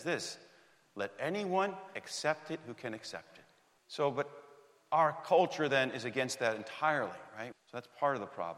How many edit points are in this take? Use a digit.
2